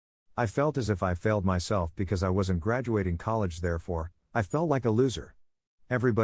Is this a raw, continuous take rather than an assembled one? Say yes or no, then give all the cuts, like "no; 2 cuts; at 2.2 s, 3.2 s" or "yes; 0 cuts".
yes; 0 cuts